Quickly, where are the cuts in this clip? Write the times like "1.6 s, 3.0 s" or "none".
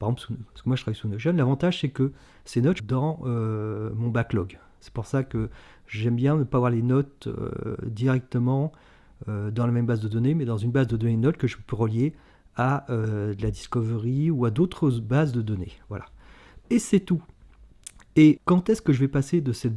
2.8 s, 18.4 s